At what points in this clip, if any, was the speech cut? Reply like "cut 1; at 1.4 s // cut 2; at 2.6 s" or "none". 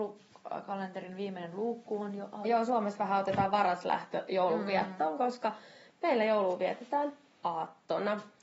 cut 1; at 2.4 s